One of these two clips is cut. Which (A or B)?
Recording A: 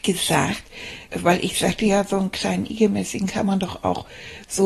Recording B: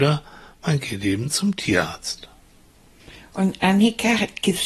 A